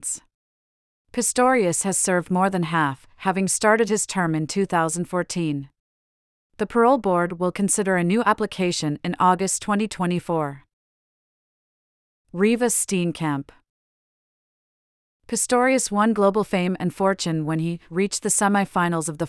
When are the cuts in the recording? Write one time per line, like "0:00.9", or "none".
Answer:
none